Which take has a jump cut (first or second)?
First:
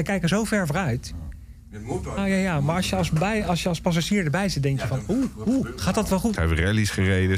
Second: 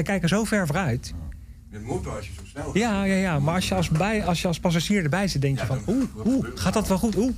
first